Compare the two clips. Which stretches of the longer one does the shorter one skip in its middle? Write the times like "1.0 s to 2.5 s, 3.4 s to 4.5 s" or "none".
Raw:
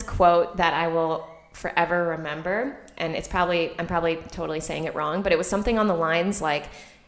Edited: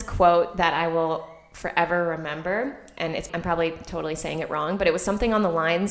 3.3 s to 3.7 s